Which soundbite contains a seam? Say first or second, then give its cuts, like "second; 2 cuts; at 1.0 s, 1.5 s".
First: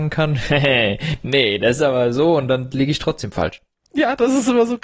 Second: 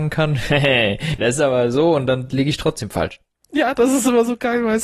second; 1 cut; at 1.2 s